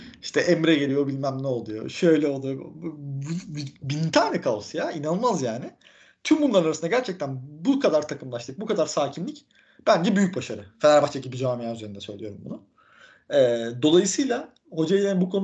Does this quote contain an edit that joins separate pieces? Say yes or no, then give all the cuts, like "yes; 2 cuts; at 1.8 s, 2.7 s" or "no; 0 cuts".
no; 0 cuts